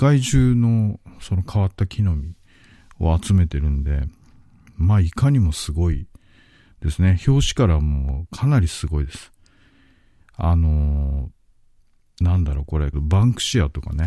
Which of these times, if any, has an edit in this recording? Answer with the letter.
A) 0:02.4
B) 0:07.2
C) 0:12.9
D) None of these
C